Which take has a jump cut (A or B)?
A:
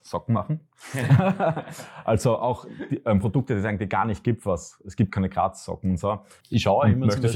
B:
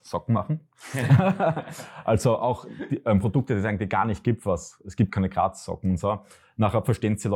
A